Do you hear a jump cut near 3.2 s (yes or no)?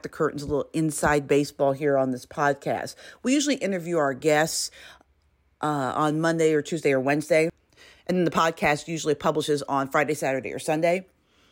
no